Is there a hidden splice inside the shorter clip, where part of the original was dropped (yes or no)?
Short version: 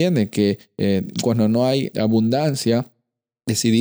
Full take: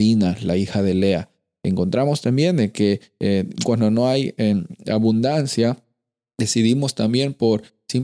yes